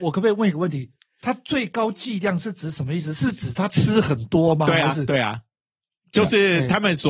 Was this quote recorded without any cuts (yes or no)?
yes